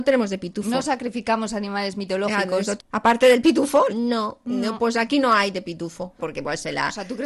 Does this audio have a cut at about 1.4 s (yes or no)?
no